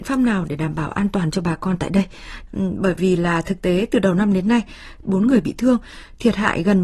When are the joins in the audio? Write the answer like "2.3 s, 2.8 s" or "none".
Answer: 2.5 s, 5.0 s